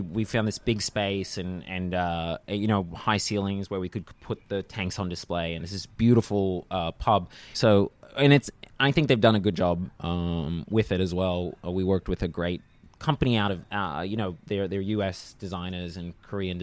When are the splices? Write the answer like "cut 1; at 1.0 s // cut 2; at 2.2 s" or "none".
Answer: cut 1; at 7.5 s